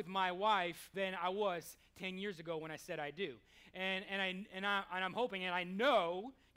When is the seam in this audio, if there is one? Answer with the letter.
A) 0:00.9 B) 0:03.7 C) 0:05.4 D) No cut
A